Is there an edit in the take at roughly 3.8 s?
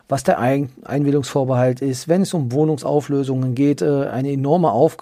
yes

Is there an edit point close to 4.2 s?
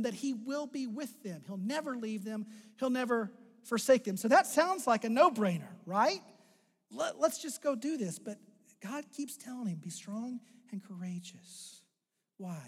no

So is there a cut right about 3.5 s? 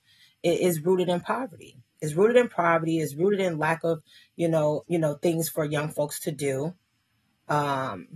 no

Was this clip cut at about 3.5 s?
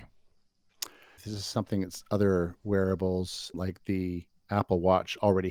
yes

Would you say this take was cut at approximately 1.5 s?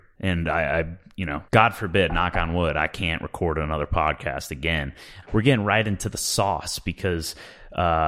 yes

